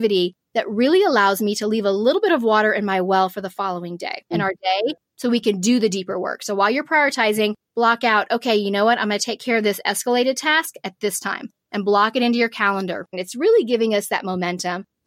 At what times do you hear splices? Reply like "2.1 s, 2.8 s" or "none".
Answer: 4.3 s, 13.1 s